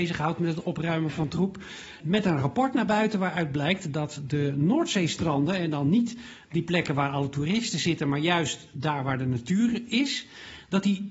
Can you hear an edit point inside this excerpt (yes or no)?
yes